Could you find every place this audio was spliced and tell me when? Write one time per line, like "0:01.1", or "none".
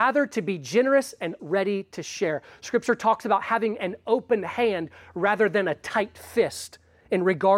0:01.4

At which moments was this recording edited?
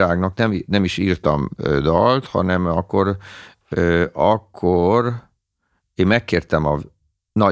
none

